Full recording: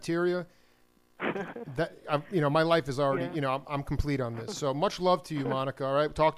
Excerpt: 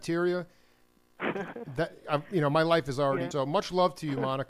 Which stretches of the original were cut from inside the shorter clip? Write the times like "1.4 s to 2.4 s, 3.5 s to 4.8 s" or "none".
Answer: 3.3 s to 4.6 s